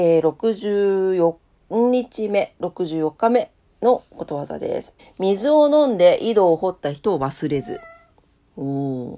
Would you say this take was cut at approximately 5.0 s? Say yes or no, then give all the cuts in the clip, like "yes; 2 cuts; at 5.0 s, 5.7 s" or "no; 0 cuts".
yes; 1 cut; at 5.0 s